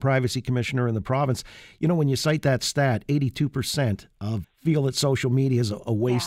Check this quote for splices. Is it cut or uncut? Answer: cut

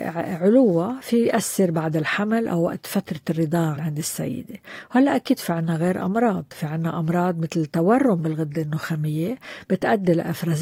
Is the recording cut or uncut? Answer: cut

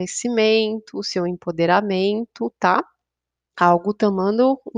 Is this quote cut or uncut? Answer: uncut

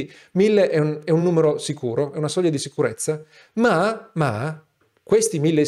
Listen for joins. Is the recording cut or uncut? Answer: uncut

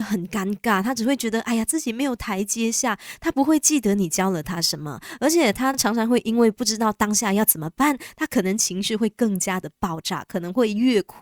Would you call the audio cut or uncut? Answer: uncut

